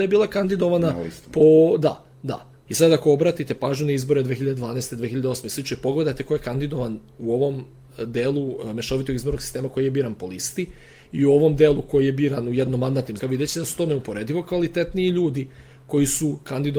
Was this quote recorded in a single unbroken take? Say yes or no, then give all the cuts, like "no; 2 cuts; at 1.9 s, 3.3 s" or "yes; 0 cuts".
no; 2 cuts; at 2.7 s, 13.2 s